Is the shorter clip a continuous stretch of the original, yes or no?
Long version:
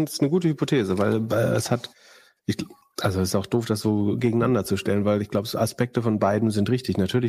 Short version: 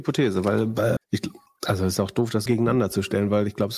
no